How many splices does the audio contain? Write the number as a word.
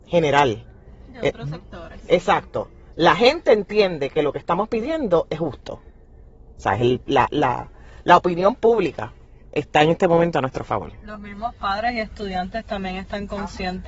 zero